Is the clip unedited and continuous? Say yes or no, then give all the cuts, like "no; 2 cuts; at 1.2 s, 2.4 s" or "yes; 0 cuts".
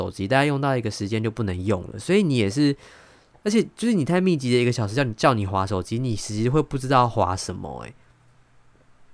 yes; 0 cuts